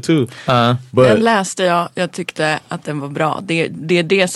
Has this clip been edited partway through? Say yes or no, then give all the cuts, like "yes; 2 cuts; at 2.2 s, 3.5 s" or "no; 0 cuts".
no; 0 cuts